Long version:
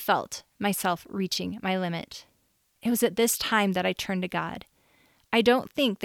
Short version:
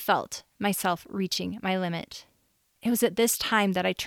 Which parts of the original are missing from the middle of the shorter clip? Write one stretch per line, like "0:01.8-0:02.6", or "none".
none

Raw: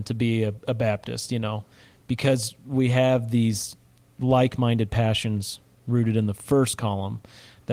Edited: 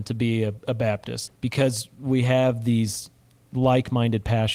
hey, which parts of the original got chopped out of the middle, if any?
0:01.3-0:01.9

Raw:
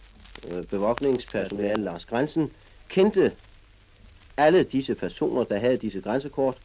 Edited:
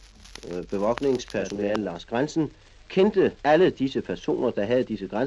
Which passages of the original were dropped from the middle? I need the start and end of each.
0:03.4-0:04.3

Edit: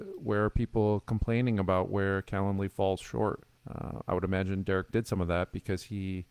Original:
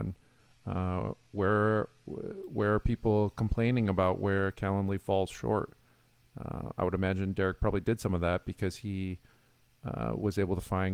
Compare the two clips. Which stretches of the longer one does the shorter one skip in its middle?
0:05.9-0:06.3
0:07.6-0:07.8

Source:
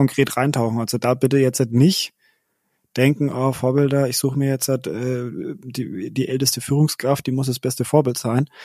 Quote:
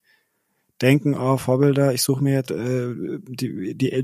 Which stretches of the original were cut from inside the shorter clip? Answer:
0:04.6-0:04.8

